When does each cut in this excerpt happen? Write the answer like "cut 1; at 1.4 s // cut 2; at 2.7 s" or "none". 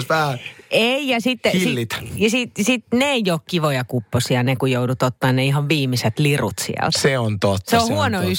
none